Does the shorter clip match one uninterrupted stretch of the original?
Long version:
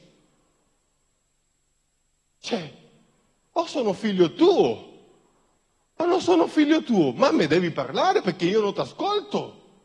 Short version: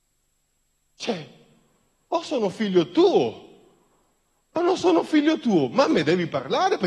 yes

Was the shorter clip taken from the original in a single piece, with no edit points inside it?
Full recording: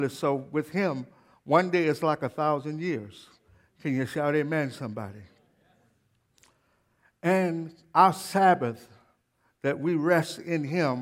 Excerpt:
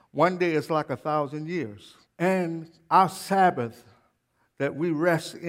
no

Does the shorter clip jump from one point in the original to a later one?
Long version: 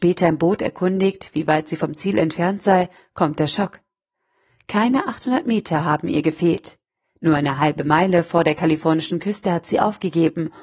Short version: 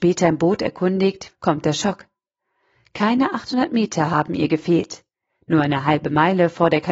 yes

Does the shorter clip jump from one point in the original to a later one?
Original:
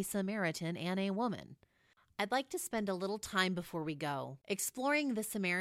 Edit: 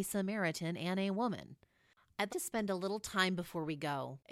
yes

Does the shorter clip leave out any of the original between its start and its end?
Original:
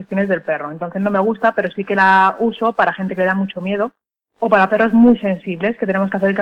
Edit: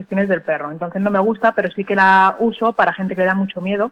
no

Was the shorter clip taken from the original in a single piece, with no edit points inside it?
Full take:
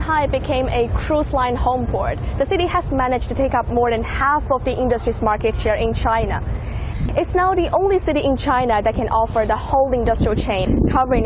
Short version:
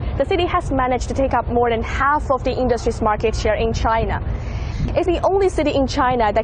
no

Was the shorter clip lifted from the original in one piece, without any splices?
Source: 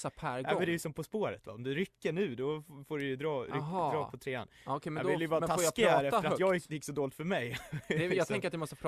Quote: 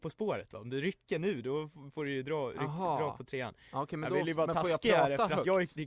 yes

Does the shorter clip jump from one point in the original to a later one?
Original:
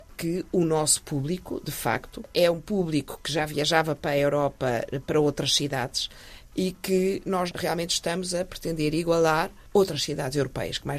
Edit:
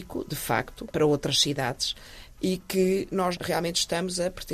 yes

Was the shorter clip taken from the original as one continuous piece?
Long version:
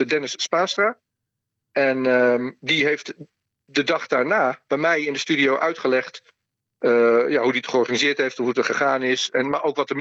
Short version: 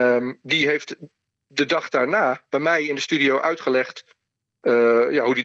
yes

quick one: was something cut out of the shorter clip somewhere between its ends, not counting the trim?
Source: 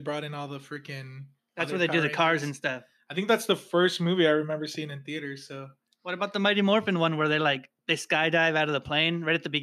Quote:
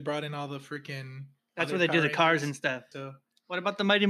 yes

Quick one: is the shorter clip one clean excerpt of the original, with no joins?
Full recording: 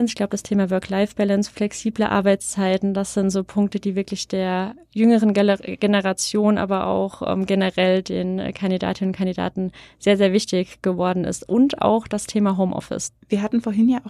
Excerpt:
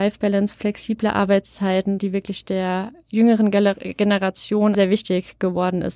no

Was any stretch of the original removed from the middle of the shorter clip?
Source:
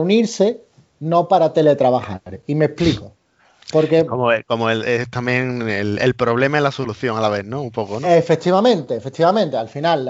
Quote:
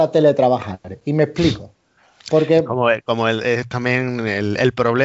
no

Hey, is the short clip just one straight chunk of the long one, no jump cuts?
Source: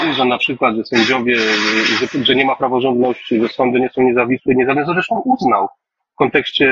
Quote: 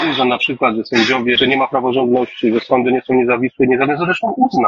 no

